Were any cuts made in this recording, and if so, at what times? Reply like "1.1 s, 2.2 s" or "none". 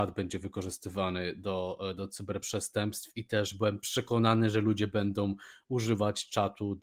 none